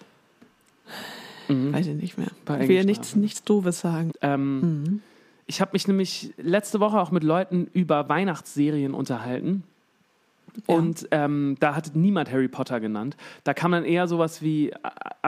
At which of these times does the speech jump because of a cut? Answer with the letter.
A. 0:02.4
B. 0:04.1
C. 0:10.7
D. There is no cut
B